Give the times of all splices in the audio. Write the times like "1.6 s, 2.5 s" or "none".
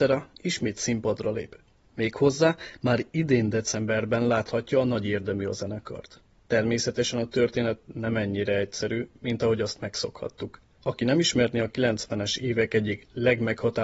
10.8 s